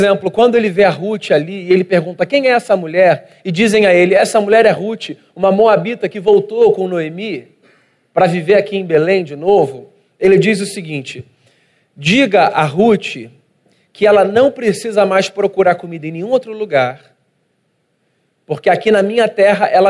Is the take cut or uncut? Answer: uncut